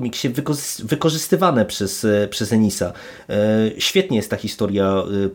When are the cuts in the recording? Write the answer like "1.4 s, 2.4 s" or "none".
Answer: none